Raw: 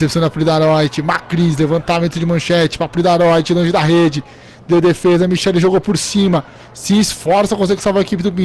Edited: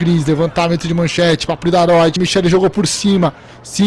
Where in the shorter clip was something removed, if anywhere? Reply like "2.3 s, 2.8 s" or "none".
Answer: 2.2 s